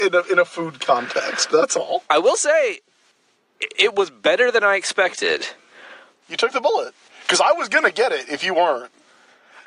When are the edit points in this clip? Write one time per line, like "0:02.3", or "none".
0:02.1
0:06.2